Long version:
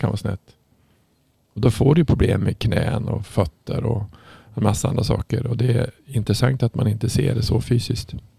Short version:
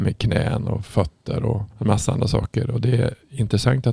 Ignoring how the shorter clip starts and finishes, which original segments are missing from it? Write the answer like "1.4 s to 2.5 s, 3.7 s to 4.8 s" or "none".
4.1 s to 4.5 s